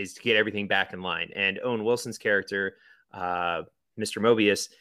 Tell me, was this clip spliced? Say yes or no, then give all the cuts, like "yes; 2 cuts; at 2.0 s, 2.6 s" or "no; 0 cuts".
no; 0 cuts